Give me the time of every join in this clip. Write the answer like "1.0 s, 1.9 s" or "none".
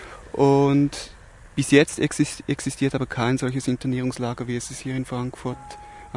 none